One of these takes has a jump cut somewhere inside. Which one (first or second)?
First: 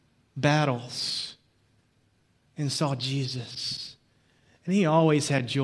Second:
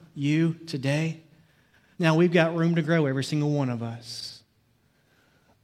second